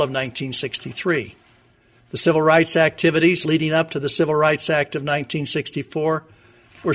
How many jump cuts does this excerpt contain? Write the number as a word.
zero